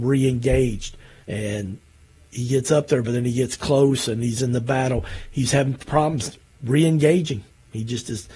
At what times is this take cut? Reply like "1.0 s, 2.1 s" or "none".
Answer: 1.2 s